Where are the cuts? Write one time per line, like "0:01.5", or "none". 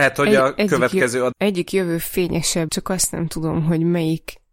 0:01.3
0:02.7